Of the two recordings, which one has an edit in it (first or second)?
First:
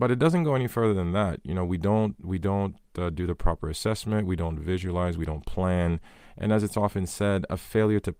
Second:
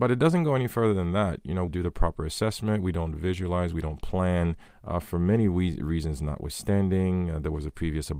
second